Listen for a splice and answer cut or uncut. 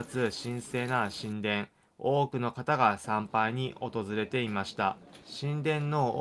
uncut